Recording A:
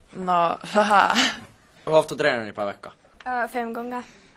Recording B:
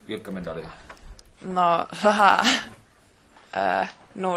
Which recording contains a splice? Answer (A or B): A